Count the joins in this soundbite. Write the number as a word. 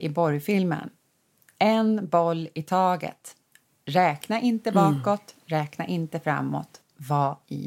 zero